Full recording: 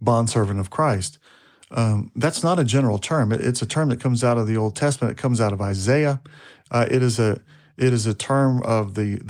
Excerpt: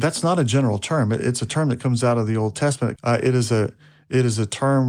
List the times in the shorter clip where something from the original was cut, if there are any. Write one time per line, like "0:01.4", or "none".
0:03.0